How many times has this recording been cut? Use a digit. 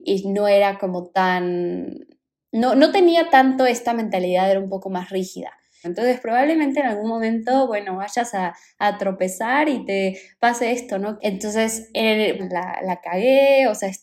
3